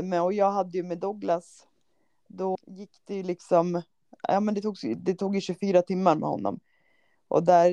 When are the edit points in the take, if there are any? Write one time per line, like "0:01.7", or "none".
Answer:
0:02.5